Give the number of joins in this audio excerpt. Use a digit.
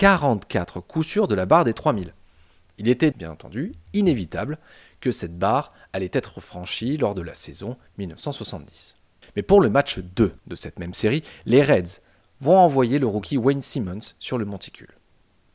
3